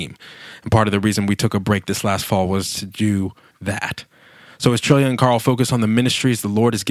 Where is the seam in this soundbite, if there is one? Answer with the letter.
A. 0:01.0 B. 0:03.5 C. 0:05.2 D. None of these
B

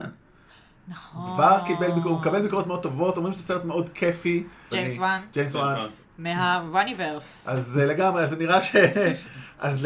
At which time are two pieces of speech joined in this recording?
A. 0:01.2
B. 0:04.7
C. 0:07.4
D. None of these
B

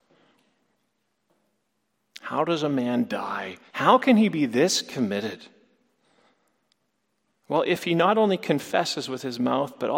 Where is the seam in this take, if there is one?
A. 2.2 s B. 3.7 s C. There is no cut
B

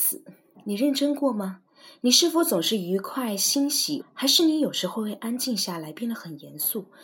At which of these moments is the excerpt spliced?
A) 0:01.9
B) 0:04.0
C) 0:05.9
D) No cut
B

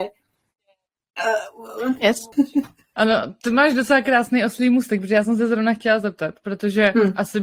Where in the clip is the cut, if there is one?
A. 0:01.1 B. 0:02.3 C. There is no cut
B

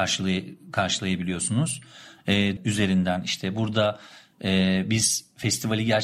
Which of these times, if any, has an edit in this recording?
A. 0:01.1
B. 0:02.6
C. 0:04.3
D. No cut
B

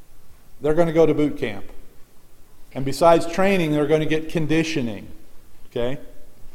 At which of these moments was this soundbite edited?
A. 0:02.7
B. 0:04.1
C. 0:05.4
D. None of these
A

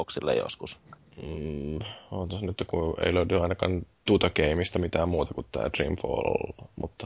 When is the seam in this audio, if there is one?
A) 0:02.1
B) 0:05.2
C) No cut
C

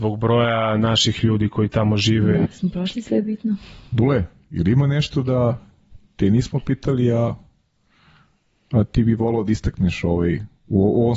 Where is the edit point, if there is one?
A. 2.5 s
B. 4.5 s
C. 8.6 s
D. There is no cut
A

